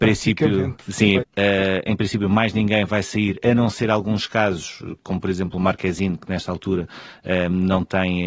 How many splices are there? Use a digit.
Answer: 1